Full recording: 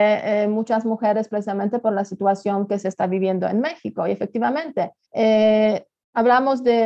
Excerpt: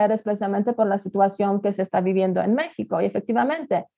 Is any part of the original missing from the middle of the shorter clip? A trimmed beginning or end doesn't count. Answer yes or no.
no